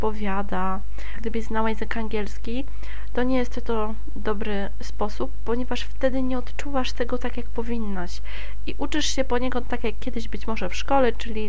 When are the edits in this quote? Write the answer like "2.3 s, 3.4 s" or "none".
1.2 s